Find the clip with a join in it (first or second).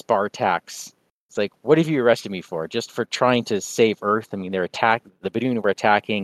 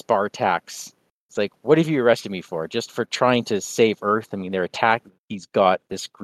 second